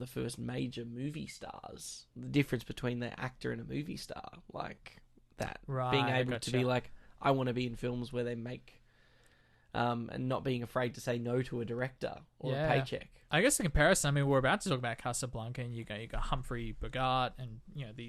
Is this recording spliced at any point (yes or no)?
no